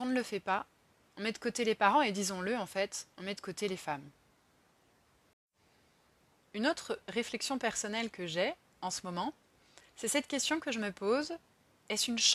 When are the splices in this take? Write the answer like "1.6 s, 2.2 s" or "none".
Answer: 3.1 s, 9.9 s